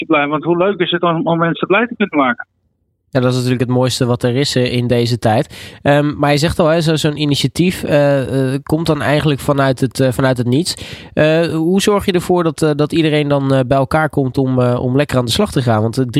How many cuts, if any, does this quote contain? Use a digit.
0